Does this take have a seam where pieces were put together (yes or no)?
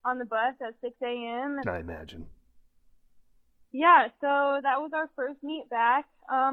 yes